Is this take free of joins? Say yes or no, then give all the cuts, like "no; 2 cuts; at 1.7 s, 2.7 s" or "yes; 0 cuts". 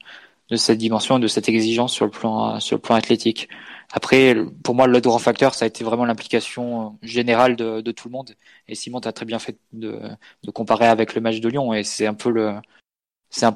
yes; 0 cuts